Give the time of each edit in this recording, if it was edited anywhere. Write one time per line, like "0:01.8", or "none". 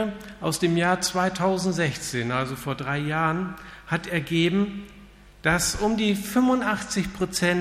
none